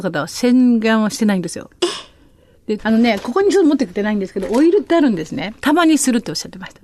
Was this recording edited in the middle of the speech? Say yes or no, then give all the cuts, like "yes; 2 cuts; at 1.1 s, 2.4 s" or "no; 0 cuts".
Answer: yes; 2 cuts; at 2.8 s, 5.6 s